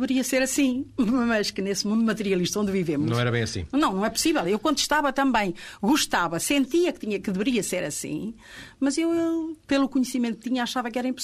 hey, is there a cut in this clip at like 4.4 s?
yes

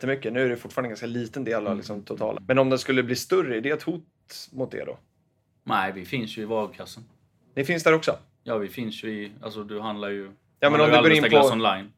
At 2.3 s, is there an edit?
yes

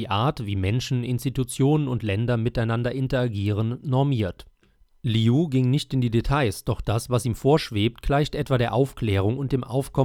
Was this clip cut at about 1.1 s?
no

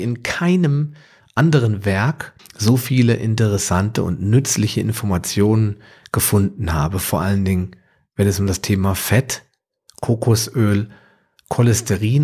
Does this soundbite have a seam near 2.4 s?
yes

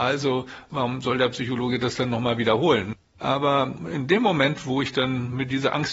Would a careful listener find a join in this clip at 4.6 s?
no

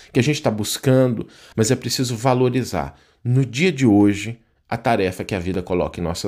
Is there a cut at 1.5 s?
yes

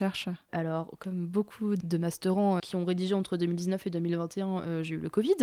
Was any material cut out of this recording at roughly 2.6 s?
yes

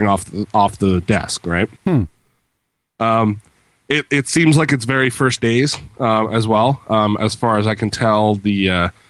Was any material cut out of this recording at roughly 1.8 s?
yes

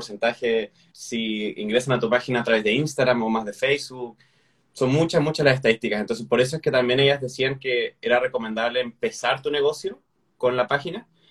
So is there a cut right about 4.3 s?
no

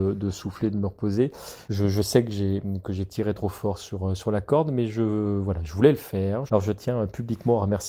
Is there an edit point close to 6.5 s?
yes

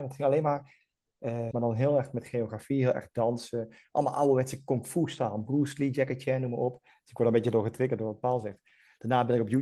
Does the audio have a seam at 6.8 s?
no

